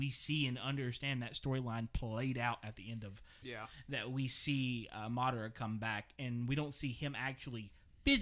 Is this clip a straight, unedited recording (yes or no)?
no